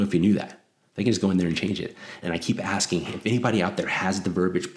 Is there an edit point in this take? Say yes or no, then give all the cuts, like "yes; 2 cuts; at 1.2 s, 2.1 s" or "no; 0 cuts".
yes; 1 cut; at 2.2 s